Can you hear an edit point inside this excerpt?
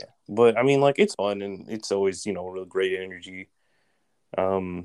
yes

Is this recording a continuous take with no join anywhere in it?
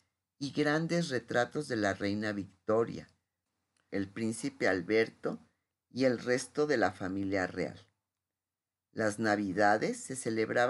no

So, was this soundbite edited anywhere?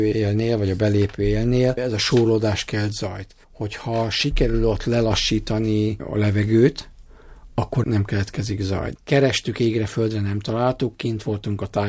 yes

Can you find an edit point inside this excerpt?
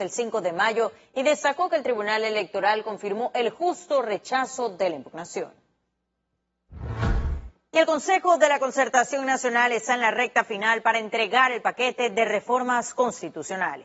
no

